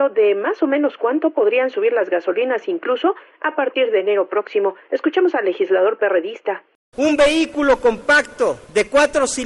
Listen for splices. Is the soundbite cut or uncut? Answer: uncut